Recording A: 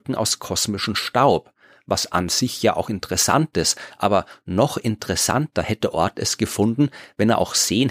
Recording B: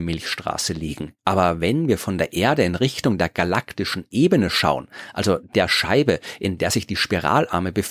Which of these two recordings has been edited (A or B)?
B